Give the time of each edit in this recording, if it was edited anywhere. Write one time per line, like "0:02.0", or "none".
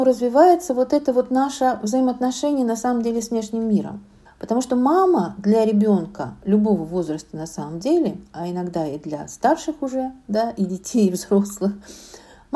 0:04.3